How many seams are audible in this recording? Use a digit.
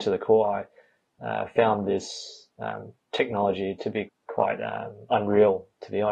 1